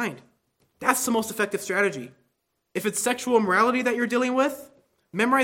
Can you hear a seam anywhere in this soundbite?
no; 0 cuts

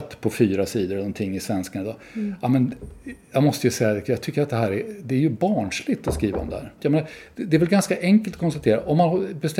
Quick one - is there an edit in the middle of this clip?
yes; 1 cut; at 6.8 s

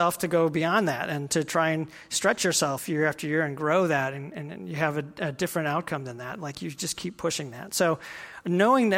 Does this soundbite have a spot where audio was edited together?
no; 0 cuts

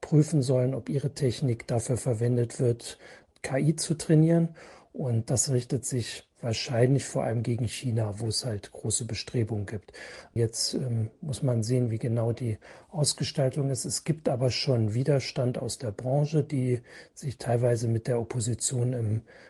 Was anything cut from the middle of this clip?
no; 0 cuts

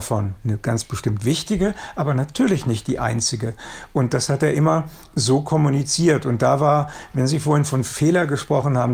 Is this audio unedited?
yes; 0 cuts

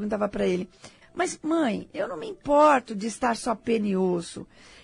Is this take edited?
yes; 1 cut; at 1.0 s

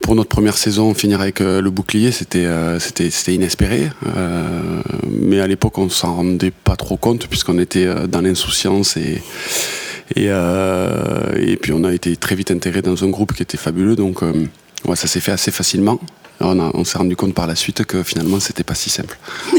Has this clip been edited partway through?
no; 0 cuts

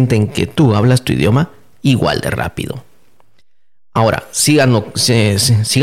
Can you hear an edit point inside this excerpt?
no; 0 cuts

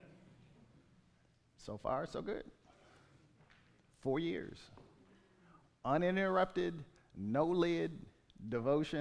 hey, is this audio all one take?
yes; 0 cuts

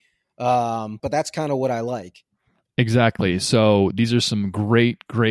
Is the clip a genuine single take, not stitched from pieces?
no; 1 cut; at 1.0 s

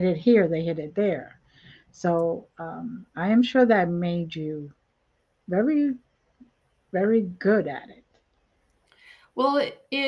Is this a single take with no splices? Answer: no; 1 cut; at 5.4 s

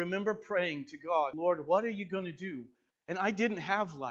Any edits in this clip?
yes; 2 cuts; at 1.3 s, 2.9 s

